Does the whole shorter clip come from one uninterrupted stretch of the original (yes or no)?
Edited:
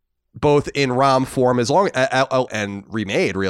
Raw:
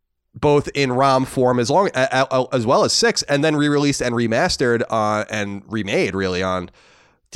no